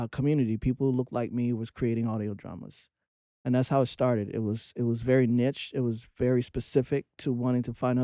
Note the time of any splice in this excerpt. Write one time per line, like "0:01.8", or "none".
none

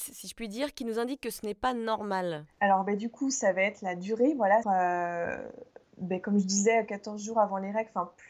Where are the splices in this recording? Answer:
0:04.6

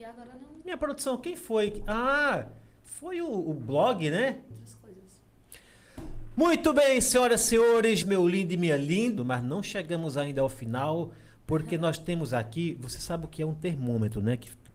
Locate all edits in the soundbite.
0:04.5
0:08.0
0:09.2

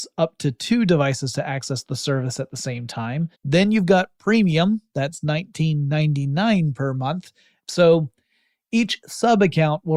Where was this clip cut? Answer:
0:03.3
0:07.6

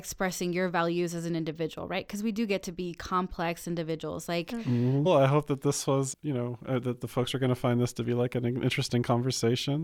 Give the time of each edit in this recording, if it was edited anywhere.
0:05.1
0:06.1

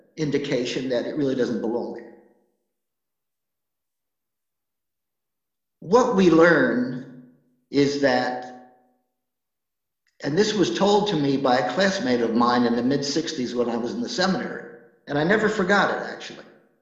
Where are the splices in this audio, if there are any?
none

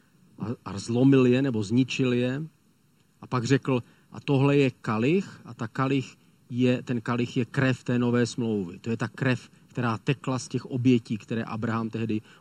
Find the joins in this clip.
none

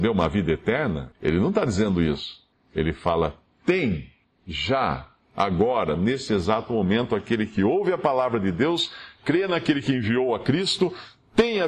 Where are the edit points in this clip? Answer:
0:01.1
0:02.5

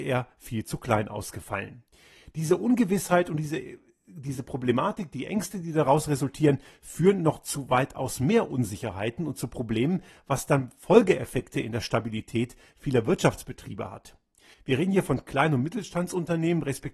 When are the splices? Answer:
0:14.5

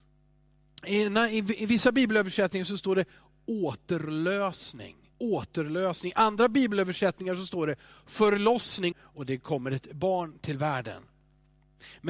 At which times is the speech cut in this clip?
0:05.1
0:08.9

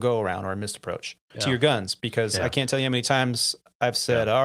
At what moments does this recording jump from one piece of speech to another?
0:01.3

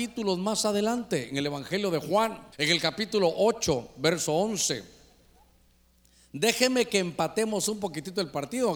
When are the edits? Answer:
0:02.5

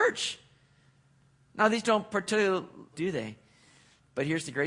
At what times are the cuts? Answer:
0:02.9

